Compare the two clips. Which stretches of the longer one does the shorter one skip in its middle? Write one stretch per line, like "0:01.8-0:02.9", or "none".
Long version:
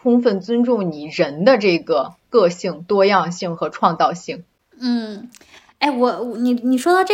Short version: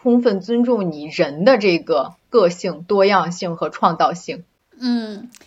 none